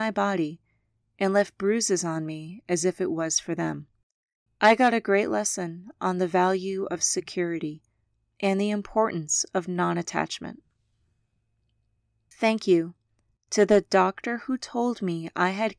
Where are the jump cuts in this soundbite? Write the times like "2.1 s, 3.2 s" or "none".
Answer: 4.5 s